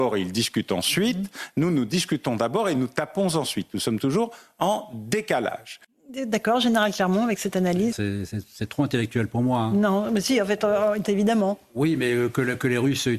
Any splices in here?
yes; 2 cuts; at 7.9 s, 11.0 s

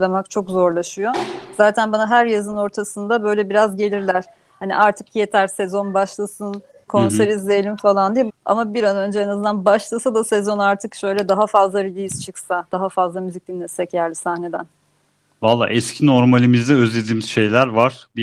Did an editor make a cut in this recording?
yes; 2 cuts; at 6.9 s, 8.3 s

